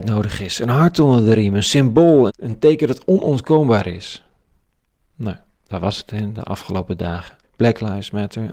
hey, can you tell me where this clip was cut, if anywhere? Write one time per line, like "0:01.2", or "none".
0:02.3
0:07.4